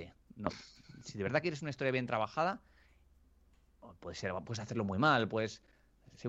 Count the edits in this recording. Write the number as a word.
zero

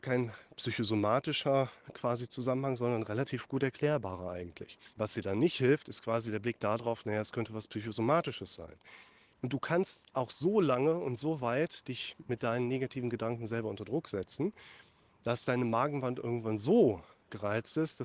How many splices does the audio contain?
two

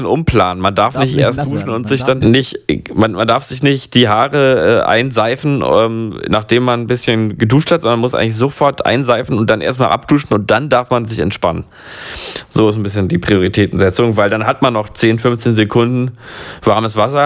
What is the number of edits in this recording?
one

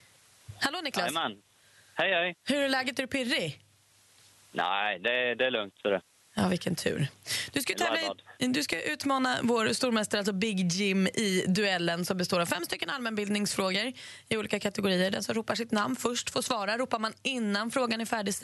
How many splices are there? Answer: zero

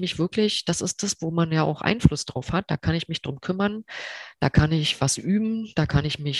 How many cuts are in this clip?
zero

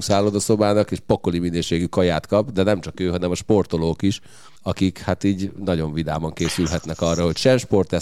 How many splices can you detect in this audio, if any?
one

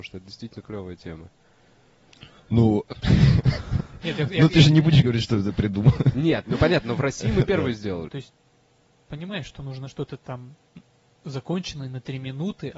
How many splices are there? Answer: one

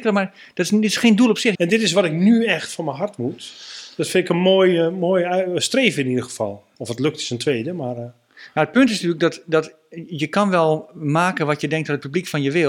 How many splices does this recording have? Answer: one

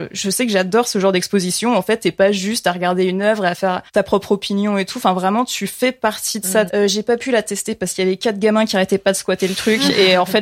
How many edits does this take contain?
two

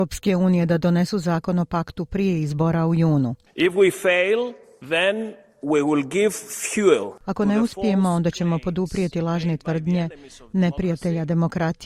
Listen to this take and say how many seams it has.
zero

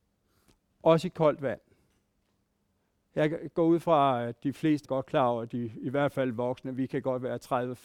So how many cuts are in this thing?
one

